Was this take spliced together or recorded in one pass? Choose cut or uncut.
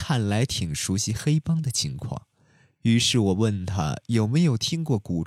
uncut